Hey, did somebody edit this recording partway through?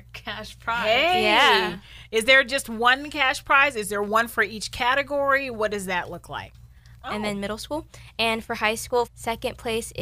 yes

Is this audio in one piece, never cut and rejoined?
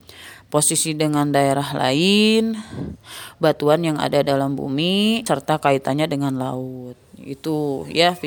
no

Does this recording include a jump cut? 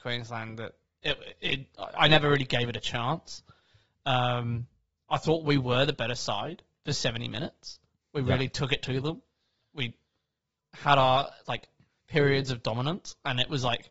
no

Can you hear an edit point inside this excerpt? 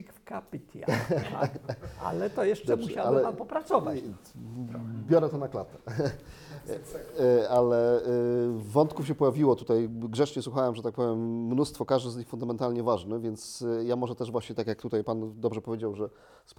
no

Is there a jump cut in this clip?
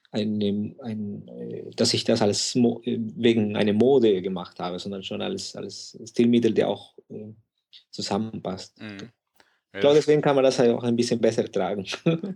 no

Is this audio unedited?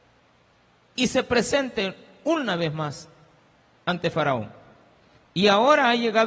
no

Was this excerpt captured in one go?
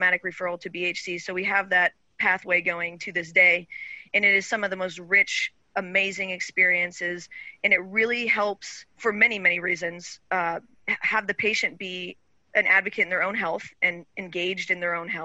no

